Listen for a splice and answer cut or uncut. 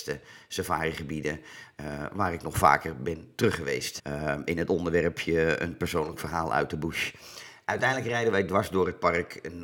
cut